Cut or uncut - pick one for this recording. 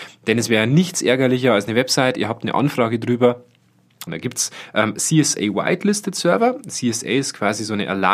cut